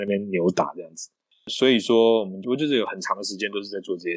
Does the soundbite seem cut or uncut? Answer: uncut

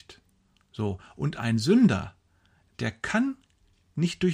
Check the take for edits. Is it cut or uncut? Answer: uncut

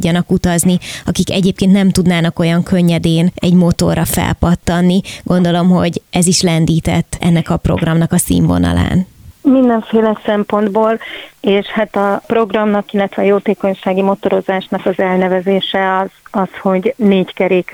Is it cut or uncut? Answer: uncut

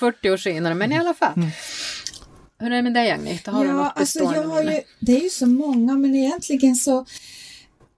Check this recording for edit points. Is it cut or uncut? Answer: uncut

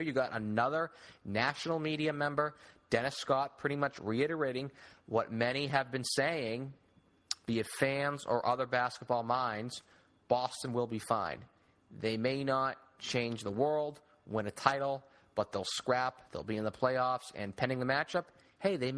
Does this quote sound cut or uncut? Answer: uncut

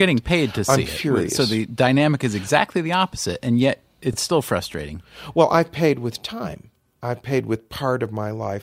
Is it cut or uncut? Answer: uncut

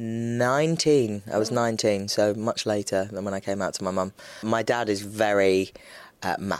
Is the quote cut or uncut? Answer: uncut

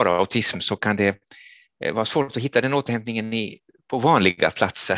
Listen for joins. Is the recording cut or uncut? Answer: uncut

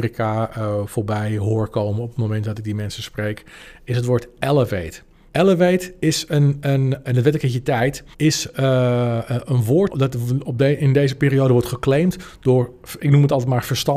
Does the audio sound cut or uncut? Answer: cut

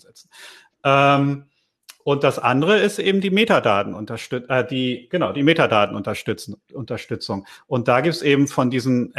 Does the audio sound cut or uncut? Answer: uncut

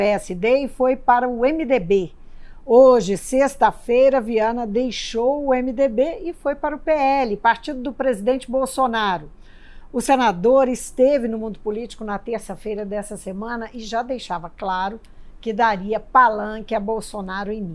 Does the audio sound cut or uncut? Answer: uncut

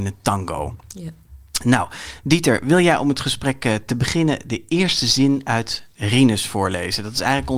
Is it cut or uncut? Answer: uncut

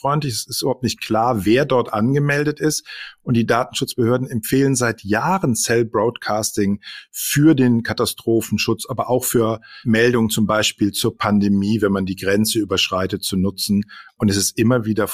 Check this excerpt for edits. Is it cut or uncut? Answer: uncut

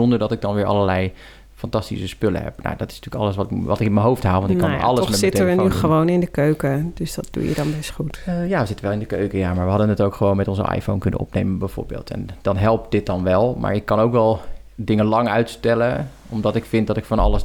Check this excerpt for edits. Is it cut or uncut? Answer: uncut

